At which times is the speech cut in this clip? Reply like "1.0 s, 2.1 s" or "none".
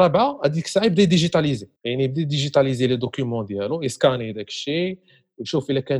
1.8 s